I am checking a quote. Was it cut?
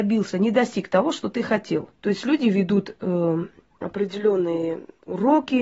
yes; 1 cut; at 2.0 s

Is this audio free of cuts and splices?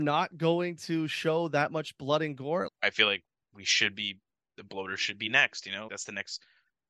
no; 2 cuts; at 2.7 s, 5.9 s

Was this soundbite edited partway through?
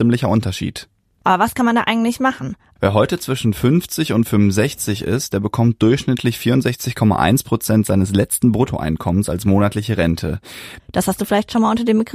yes; 2 cuts; at 2.8 s, 10.8 s

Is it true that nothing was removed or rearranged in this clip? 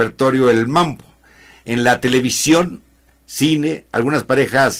yes; 0 cuts

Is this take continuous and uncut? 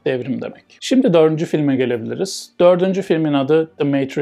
yes; 0 cuts

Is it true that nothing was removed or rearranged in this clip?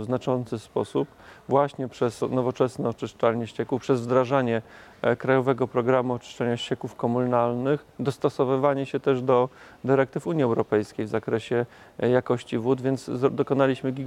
no; 1 cut; at 2.2 s

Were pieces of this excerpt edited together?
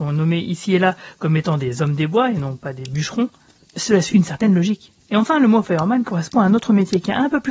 yes; 1 cut; at 4.1 s

